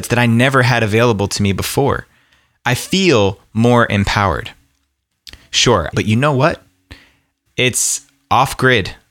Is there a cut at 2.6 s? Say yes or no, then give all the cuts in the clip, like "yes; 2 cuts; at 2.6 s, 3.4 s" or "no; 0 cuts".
no; 2 cuts; at 5.9 s, 7.5 s